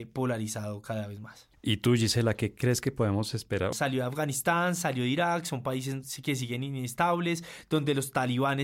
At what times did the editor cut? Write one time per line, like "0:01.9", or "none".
0:03.7